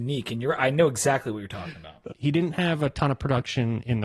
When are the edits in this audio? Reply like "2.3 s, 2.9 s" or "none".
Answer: 2.1 s